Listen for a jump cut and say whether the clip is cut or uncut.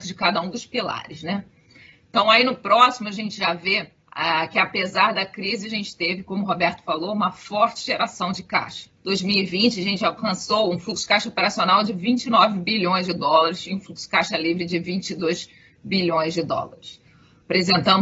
cut